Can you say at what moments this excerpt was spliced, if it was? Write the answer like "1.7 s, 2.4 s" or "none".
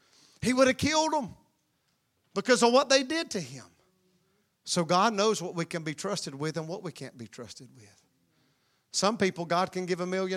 4.5 s